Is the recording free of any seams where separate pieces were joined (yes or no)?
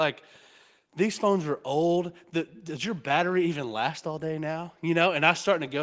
yes